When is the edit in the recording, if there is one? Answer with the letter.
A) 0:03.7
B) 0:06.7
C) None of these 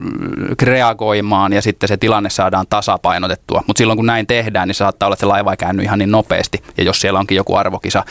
C